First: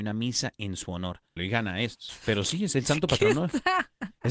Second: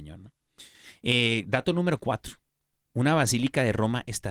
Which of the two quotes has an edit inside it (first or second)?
first